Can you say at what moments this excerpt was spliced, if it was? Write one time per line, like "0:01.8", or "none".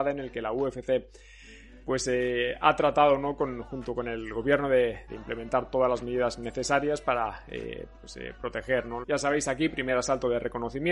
0:05.1
0:09.0